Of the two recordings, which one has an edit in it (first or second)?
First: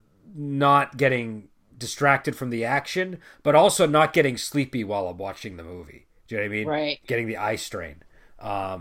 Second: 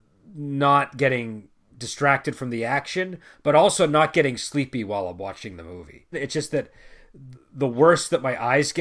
second